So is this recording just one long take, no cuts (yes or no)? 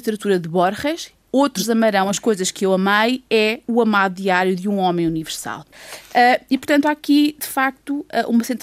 yes